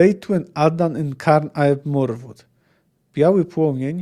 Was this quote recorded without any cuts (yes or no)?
yes